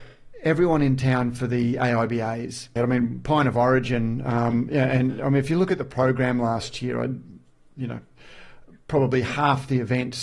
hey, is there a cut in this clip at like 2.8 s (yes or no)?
yes